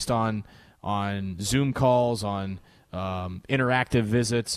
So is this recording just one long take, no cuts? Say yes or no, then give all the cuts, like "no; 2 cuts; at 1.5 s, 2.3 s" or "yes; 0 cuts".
yes; 0 cuts